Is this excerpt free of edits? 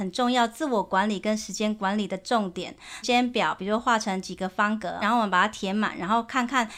no; 2 cuts; at 3.0 s, 5.0 s

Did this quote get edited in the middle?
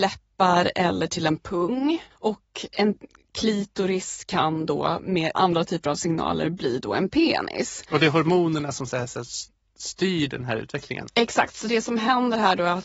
yes; 1 cut; at 2.1 s

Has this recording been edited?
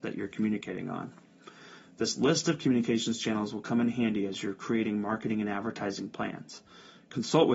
no; 0 cuts

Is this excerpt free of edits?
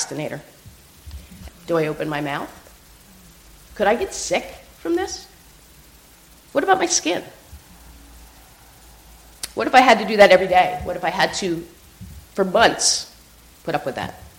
no; 1 cut; at 1.5 s

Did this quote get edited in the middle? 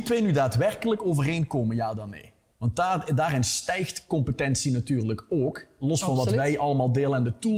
no; 0 cuts

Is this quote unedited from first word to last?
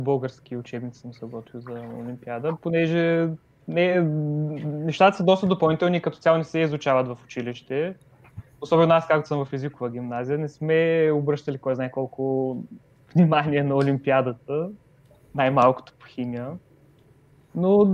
yes; 0 cuts

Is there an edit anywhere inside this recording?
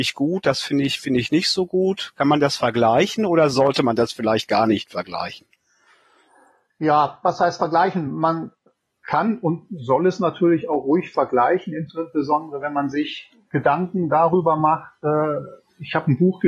no; 0 cuts

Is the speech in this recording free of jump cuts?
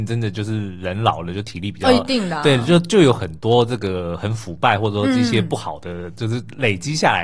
yes; 0 cuts

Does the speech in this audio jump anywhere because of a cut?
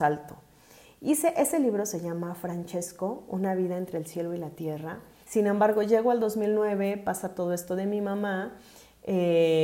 yes; 1 cut; at 5.2 s

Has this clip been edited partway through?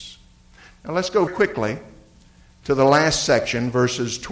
yes; 1 cut; at 1.3 s

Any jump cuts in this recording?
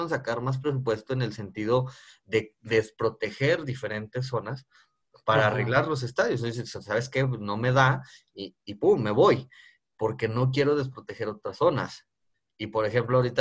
no; 0 cuts

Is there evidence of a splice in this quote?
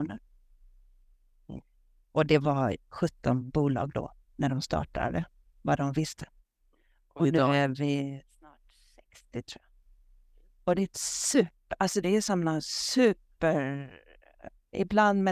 no; 0 cuts

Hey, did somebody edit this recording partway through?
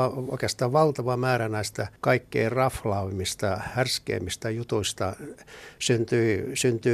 yes; 2 cuts; at 2.0 s, 5.8 s

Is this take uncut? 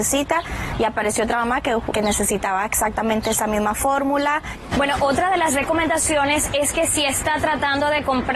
no; 2 cuts; at 1.9 s, 4.7 s

